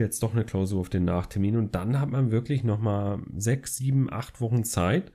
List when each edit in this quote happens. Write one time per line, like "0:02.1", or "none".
none